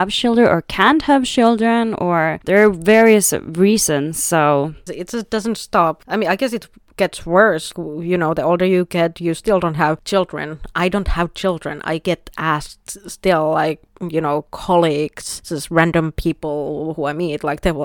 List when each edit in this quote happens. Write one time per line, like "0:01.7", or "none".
0:04.9